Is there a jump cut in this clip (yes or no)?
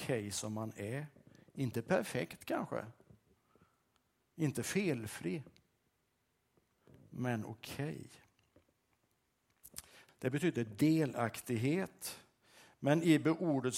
yes